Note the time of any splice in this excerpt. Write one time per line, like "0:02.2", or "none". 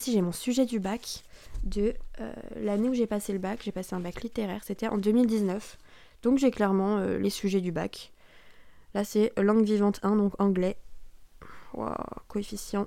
none